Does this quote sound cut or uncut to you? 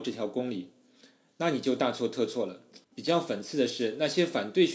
cut